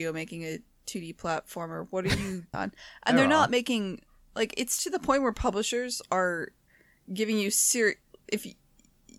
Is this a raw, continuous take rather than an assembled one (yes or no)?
no